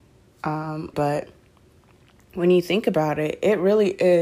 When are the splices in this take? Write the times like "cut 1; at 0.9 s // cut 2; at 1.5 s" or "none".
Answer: cut 1; at 0.9 s